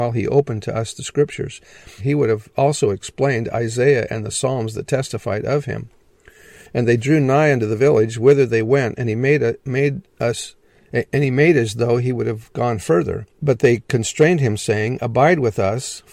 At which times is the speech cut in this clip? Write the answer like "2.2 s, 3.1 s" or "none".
2.0 s, 13.3 s